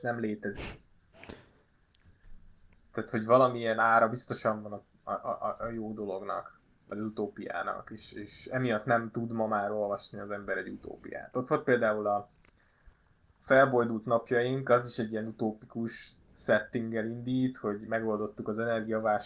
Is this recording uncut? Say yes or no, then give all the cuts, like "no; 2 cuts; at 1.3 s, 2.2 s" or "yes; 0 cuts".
yes; 0 cuts